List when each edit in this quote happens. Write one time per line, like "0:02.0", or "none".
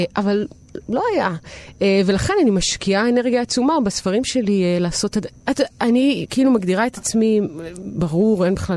0:05.3

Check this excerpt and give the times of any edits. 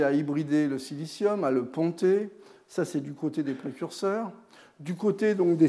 none

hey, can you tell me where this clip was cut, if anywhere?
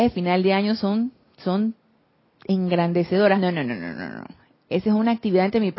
0:03.4

